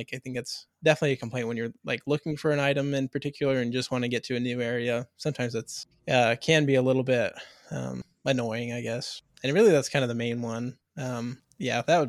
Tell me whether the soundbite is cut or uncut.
uncut